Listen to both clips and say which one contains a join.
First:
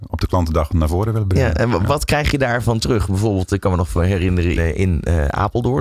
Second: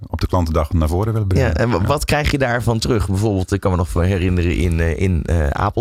first; 1 cut; at 4.6 s

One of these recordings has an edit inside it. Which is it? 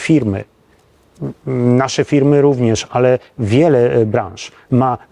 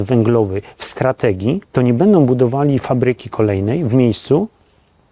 second; 1 cut; at 1.6 s

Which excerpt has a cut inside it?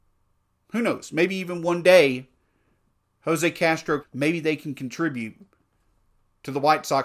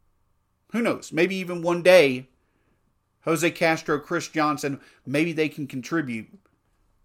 first; 1 cut; at 4.0 s

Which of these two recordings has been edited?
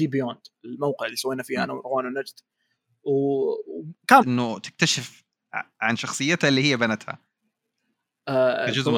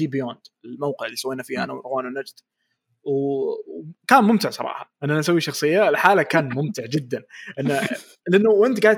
first; 1 cut; at 4.2 s

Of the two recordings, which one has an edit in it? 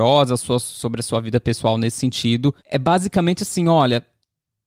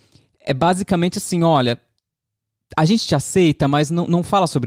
first; 1 cut; at 2.6 s

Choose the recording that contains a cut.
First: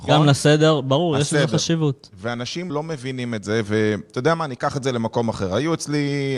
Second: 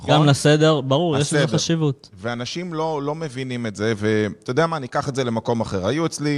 first; 1 cut; at 2.7 s

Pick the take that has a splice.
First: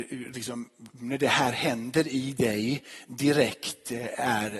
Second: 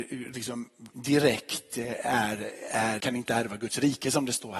second; 2 cuts; at 0.9 s, 3.0 s

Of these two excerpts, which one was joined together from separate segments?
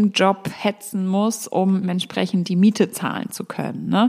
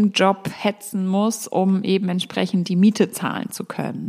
first; 1 cut; at 1.8 s

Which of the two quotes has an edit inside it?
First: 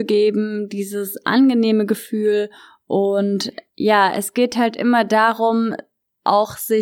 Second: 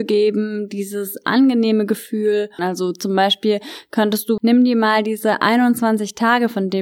second; 2 cuts; at 2.6 s, 4.4 s

